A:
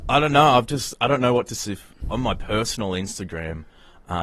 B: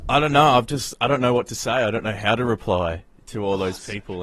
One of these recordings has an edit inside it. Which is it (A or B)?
A